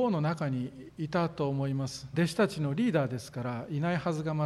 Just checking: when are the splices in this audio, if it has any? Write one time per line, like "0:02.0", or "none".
0:02.1